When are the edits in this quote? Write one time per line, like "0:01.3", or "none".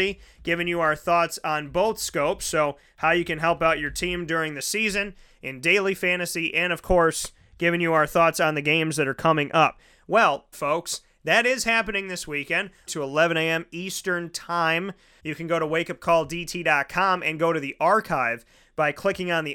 0:10.5
0:12.9
0:15.2